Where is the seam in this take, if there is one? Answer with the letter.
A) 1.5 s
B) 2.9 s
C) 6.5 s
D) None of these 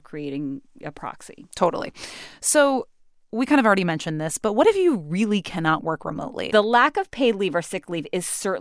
C